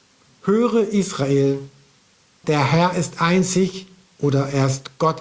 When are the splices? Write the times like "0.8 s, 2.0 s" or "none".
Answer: 2.4 s